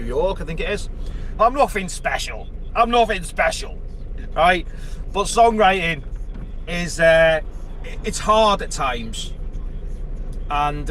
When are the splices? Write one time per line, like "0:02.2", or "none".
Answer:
0:01.4